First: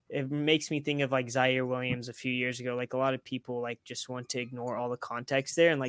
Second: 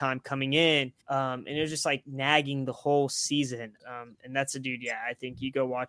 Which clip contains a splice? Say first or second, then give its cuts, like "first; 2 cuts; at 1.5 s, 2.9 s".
second; 2 cuts; at 1.0 s, 3.8 s